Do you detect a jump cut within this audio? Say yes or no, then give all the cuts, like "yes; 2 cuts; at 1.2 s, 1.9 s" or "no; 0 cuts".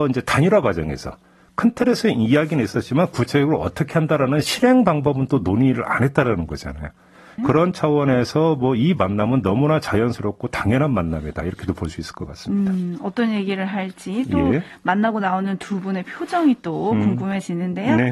yes; 1 cut; at 7.4 s